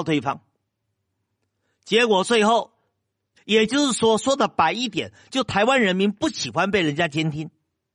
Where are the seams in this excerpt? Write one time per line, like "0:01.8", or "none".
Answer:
0:03.4